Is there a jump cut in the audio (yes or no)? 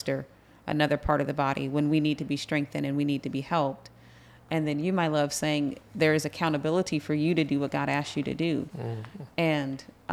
no